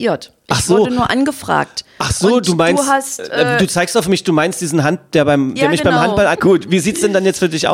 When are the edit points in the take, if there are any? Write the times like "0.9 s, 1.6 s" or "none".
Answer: 6.3 s